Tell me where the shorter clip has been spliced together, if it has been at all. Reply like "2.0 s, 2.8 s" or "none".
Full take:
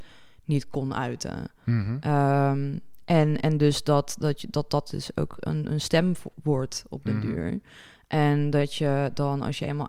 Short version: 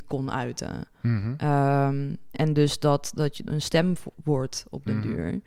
2.3 s, 3.5 s